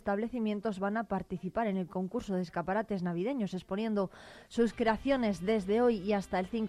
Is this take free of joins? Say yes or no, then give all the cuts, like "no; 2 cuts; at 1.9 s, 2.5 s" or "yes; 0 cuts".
yes; 0 cuts